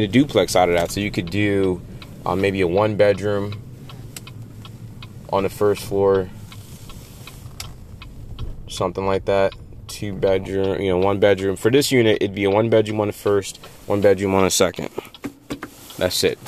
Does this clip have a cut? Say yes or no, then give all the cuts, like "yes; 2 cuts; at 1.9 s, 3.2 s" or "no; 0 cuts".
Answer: no; 0 cuts